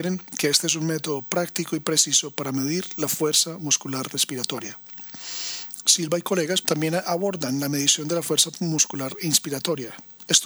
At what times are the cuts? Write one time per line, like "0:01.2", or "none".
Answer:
0:06.6